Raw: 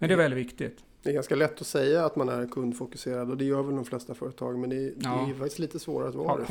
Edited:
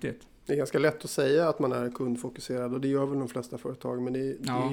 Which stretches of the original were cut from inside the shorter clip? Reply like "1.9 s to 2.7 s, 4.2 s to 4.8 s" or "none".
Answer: none